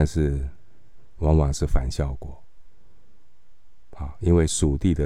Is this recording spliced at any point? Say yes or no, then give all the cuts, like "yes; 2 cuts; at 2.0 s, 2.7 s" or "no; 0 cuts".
no; 0 cuts